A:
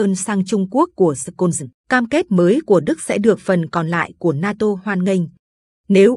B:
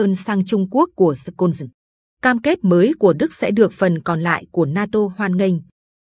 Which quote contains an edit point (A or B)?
A